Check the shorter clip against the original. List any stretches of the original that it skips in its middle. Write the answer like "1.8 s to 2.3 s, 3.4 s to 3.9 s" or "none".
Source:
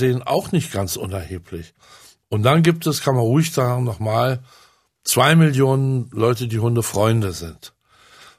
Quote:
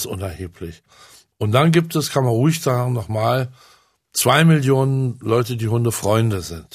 none